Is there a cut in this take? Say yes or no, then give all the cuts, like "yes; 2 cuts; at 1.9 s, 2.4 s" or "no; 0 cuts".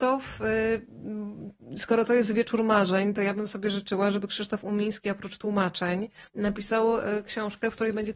yes; 1 cut; at 6.3 s